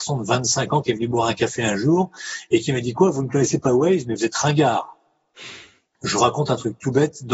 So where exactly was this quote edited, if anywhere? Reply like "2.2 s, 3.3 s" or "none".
5.9 s